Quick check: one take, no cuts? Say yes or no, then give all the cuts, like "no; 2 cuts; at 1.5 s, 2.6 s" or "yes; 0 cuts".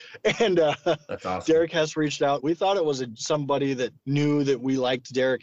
no; 2 cuts; at 2.4 s, 4.0 s